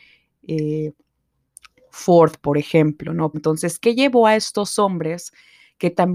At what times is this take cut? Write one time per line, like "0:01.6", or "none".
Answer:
0:03.3